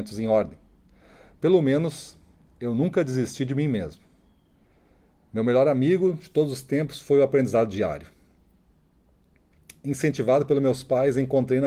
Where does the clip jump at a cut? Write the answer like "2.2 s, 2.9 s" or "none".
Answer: none